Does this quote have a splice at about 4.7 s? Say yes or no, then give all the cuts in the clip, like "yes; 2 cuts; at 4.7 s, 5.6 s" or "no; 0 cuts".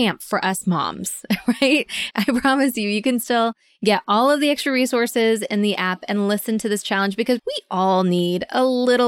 no; 2 cuts; at 2.1 s, 7.4 s